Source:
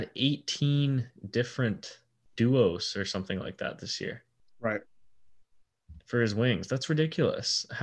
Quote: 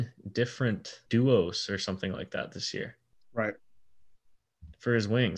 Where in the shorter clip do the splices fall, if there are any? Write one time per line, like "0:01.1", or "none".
0:01.1